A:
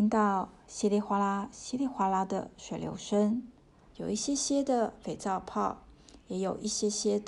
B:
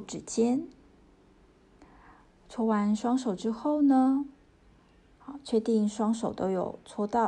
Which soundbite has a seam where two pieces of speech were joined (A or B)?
A